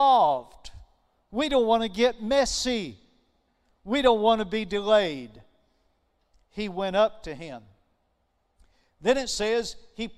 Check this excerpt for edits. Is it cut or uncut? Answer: uncut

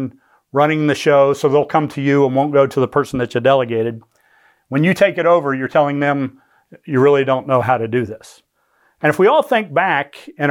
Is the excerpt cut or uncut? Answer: uncut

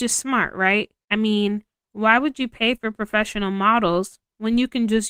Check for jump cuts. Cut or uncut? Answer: cut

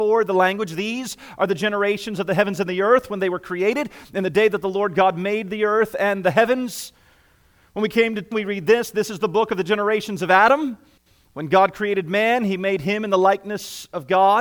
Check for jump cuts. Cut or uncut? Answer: cut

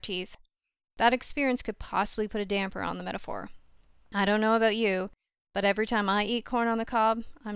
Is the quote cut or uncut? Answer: uncut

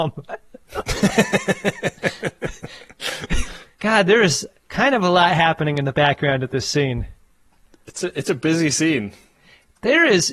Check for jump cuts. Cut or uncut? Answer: uncut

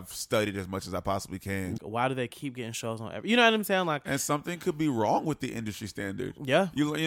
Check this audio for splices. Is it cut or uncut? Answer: cut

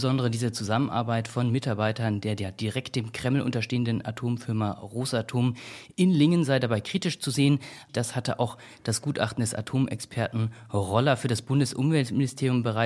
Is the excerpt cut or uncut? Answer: cut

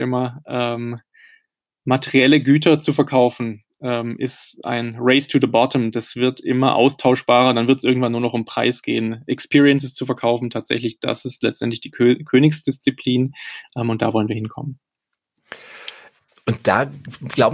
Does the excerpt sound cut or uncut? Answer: uncut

